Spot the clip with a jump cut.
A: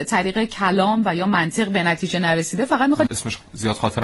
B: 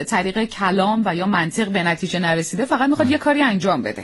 A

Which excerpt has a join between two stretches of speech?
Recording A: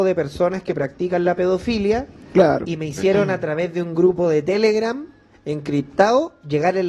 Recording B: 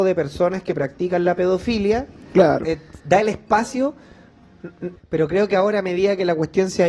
B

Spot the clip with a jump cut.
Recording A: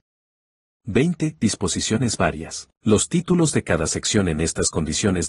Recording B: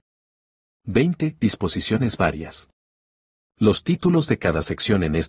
A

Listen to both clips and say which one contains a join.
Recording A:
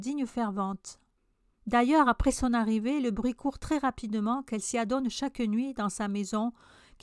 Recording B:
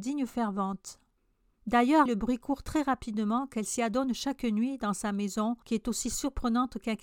B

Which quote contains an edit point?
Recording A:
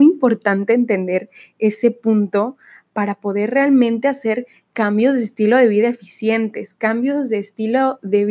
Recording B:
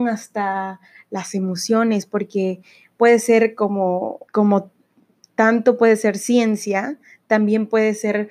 B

